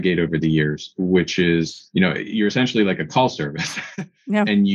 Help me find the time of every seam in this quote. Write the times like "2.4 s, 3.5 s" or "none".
none